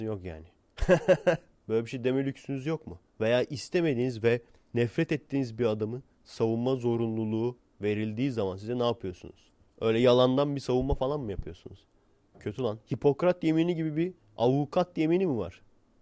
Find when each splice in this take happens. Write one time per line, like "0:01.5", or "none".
0:01.5